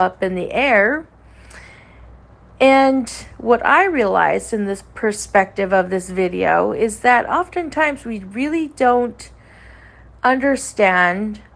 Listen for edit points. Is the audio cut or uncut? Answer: uncut